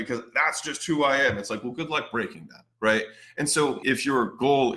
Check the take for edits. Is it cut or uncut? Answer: cut